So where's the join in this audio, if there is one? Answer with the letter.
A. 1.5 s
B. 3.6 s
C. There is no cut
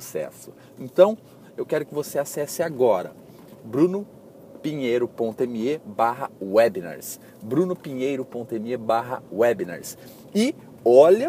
A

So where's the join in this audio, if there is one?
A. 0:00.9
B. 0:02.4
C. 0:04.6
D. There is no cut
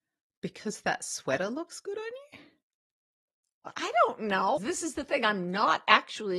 C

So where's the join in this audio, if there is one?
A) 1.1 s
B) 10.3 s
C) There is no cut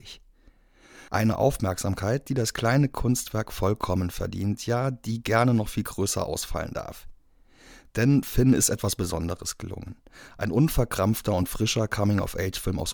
A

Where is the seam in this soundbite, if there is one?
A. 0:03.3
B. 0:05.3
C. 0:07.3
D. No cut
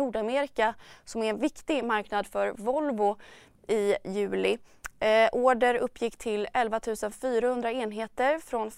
D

